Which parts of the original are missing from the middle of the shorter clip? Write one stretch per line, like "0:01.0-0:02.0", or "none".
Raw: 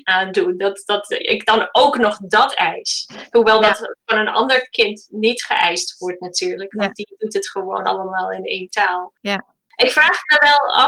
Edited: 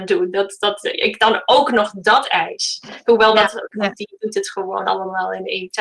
0:04.0-0:06.7

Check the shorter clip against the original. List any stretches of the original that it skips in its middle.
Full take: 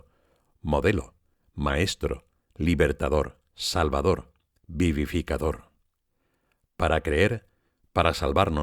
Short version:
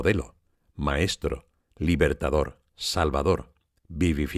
none

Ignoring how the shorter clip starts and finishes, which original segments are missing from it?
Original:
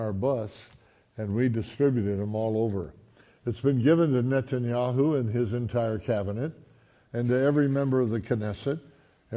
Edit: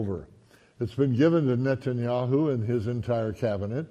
none

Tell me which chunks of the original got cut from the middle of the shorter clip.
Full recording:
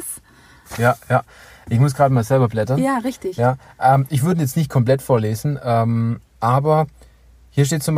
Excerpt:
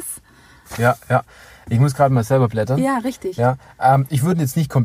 none

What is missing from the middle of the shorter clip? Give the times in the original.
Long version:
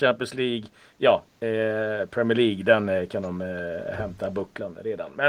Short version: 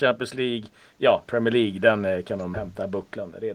0:01.3-0:02.1
0:03.4-0:04.0

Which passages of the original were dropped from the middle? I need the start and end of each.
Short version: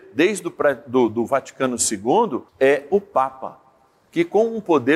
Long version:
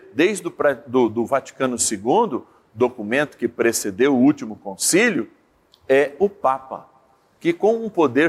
0:02.5-0:05.8

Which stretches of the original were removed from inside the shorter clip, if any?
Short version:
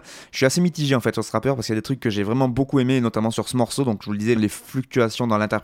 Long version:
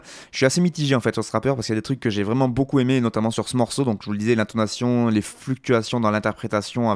0:04.4-0:05.1

